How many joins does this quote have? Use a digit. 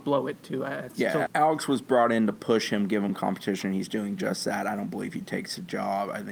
1